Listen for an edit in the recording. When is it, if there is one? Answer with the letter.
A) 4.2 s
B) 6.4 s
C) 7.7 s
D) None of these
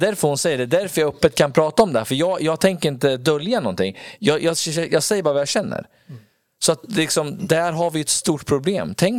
D